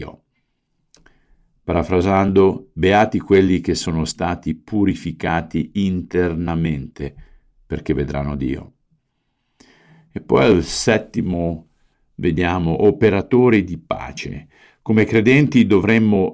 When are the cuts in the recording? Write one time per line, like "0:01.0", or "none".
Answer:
none